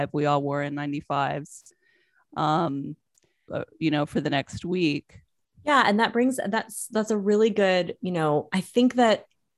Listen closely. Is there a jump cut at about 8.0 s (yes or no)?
no